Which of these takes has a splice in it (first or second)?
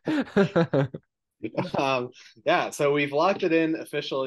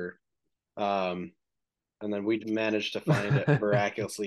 second